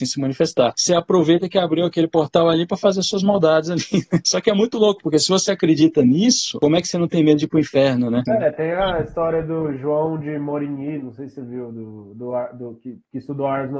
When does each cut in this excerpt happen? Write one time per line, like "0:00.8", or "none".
0:08.3

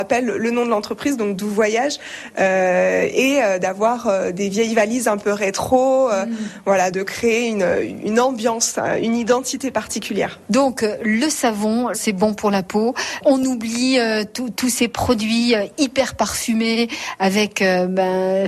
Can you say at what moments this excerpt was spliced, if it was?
0:06.9
0:11.9

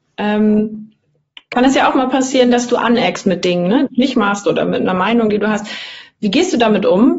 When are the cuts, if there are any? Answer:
0:03.9

